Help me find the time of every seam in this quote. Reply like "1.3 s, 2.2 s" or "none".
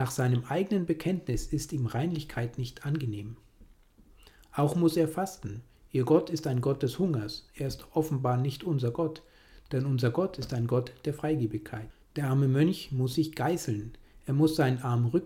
none

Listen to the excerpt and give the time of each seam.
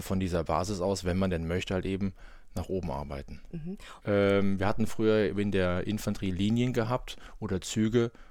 4.0 s

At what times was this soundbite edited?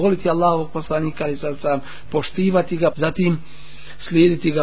2.9 s

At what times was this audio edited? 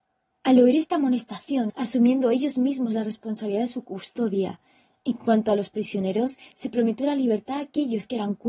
1.7 s

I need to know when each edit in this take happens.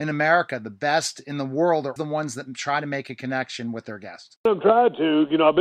2.0 s

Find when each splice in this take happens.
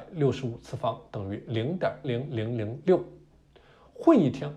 2.0 s

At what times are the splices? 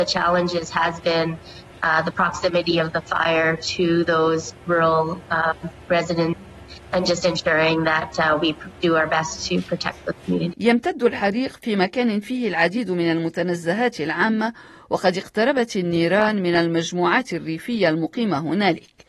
10.5 s

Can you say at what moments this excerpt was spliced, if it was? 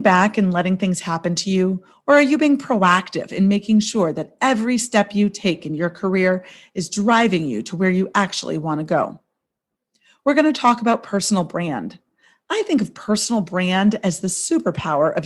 none

